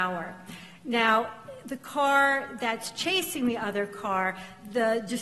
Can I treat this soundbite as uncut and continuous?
yes; 0 cuts

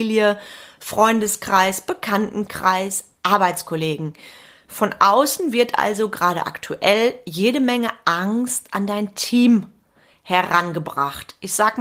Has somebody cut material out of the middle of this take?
no; 0 cuts

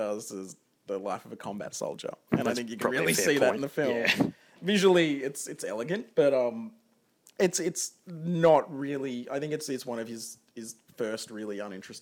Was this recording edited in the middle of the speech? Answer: no; 0 cuts

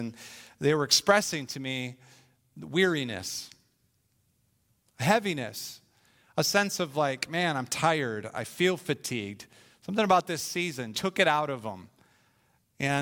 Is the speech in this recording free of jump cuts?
no; 1 cut; at 10.9 s

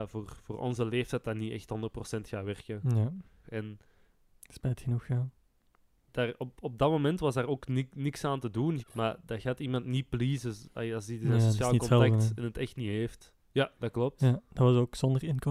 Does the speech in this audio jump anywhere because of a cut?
yes; 3 cuts; at 3.4 s, 8.8 s, 13.4 s

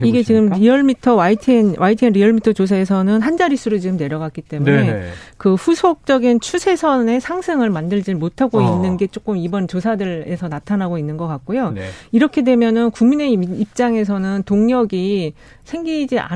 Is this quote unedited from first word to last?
yes; 0 cuts

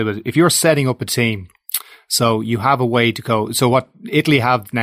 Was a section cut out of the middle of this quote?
no; 0 cuts

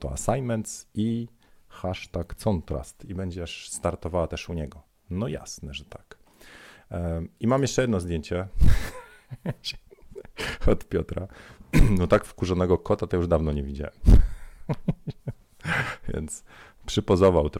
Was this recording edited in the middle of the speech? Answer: no; 0 cuts

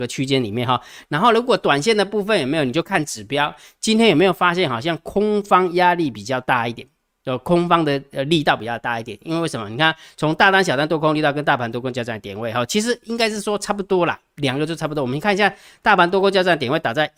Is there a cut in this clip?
no; 0 cuts

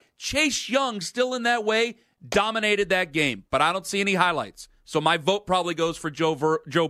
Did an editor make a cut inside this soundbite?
no; 0 cuts

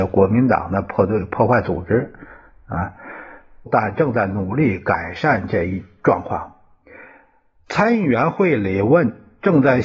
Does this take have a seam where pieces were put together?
yes; 1 cut; at 3.7 s

